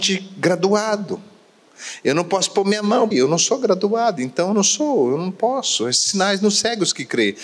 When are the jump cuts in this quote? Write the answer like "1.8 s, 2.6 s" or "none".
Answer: 3.1 s